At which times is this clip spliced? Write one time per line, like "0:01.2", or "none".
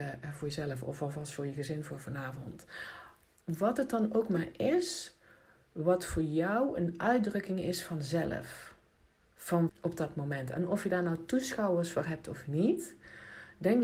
0:09.7